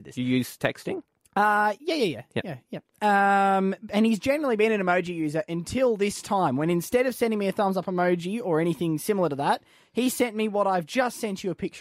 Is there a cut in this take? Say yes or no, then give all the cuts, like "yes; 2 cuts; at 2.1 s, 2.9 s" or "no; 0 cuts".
no; 0 cuts